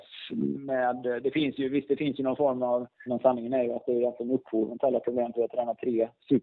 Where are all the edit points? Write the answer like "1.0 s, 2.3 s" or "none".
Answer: 3.1 s, 5.3 s